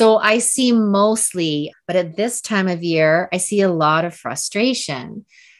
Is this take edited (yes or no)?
yes